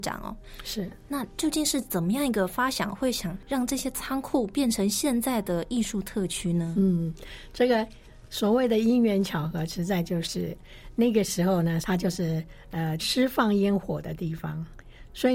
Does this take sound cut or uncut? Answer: cut